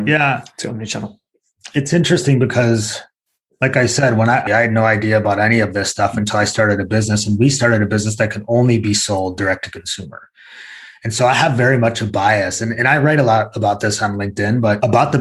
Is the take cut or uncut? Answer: cut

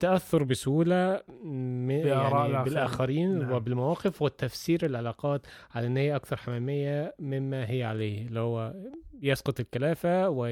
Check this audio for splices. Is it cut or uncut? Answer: uncut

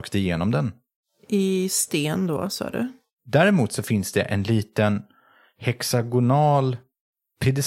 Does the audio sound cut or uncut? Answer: cut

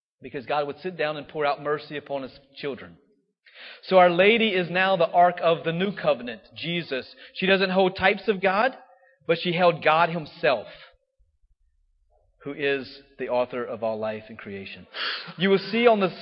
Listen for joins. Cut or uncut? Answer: uncut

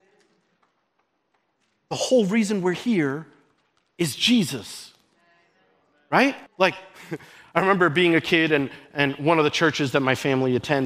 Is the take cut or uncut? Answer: cut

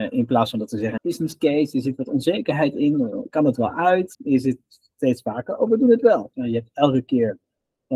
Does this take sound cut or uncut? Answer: cut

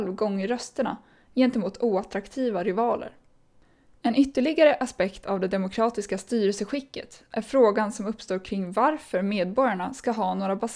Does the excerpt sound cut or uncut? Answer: uncut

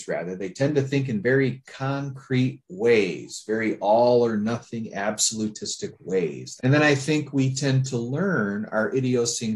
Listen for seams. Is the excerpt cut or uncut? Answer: cut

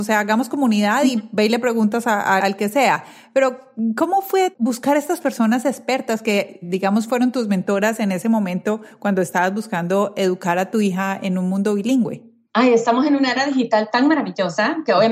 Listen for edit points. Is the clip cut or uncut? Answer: cut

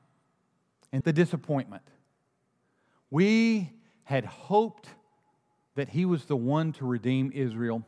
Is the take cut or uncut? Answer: cut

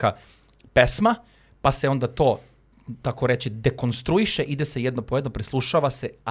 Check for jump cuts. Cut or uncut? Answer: uncut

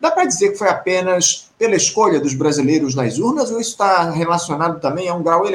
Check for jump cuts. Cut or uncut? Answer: uncut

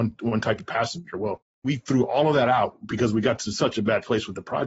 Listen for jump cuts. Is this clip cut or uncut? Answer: cut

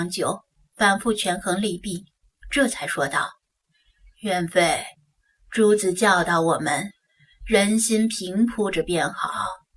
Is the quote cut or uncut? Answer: uncut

